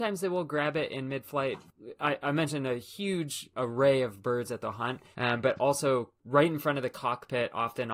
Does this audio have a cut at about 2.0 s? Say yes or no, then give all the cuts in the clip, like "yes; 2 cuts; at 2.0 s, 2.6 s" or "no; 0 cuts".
no; 1 cut; at 5.1 s